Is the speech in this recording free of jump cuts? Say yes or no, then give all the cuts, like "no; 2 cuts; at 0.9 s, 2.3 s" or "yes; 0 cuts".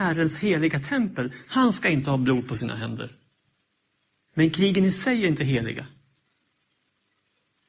no; 1 cut; at 4.3 s